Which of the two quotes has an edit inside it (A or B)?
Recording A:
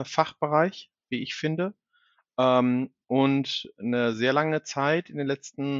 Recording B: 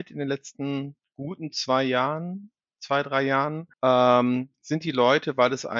B